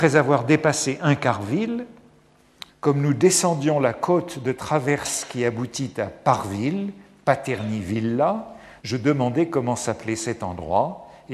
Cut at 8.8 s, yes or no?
yes